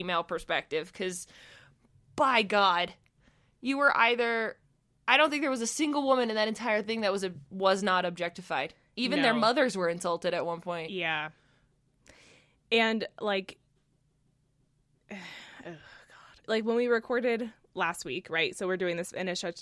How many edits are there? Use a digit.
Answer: 1